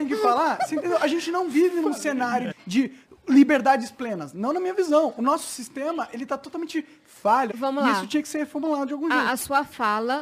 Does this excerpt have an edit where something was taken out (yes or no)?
yes